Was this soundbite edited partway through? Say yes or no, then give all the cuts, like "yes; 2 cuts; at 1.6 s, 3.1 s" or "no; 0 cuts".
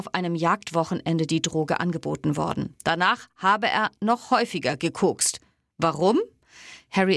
no; 0 cuts